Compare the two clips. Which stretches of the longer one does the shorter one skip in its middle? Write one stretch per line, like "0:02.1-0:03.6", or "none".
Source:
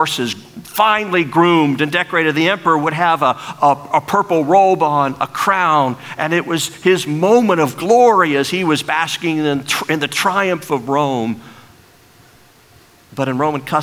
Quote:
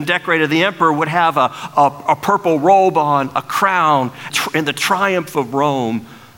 0:06.2-0:09.6